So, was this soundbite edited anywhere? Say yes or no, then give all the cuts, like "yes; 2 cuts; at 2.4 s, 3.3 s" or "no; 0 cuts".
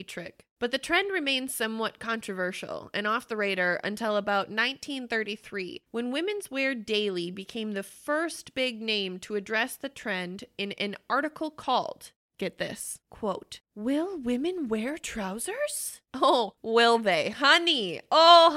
no; 0 cuts